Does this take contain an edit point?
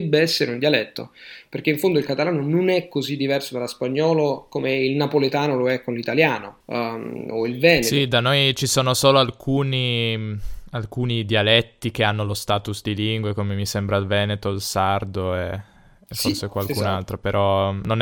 yes; 1 cut; at 6.6 s

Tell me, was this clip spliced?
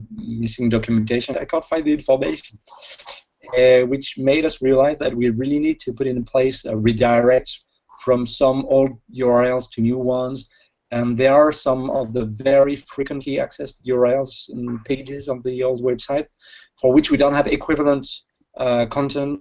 yes; 1 cut; at 1.3 s

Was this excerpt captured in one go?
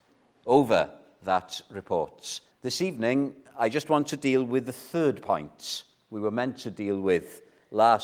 no; 1 cut; at 2.5 s

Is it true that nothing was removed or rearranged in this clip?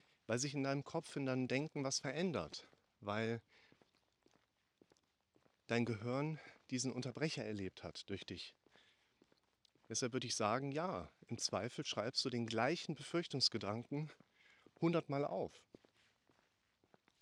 yes; 0 cuts

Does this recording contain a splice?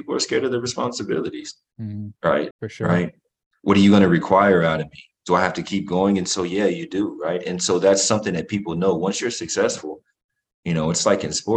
yes; 1 cut; at 2.5 s

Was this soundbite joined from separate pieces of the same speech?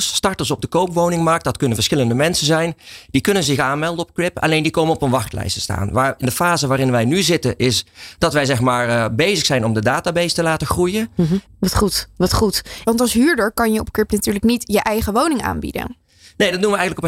yes; 2 cuts; at 11.5 s, 12.8 s

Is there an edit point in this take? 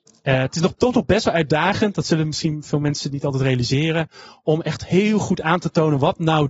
no; 0 cuts

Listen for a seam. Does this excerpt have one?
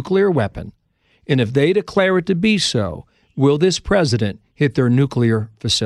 no; 0 cuts

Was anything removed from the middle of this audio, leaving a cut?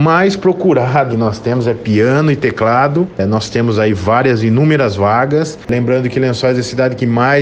yes; 2 cuts; at 1.1 s, 5.7 s

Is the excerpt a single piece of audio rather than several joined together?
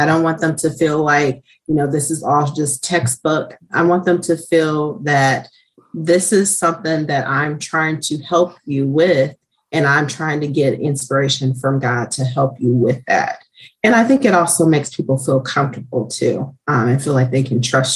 yes; 0 cuts

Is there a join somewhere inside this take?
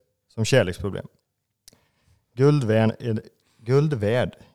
no; 0 cuts

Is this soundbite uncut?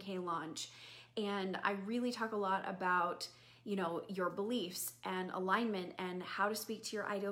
yes; 0 cuts

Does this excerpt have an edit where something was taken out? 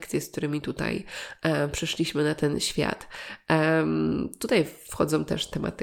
no; 0 cuts

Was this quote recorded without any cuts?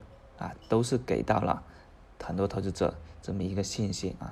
yes; 0 cuts

